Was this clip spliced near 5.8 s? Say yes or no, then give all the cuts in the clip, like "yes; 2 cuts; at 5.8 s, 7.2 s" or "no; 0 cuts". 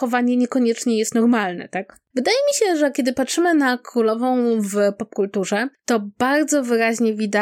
no; 1 cut; at 2.1 s